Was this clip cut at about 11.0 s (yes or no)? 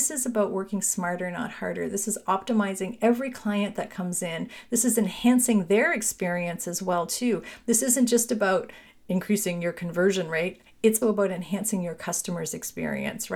yes